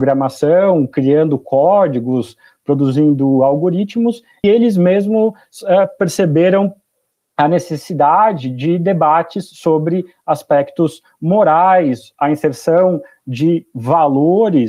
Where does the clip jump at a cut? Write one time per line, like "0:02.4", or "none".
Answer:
0:04.4